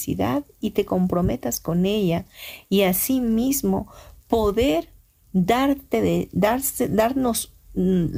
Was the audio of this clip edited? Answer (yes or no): no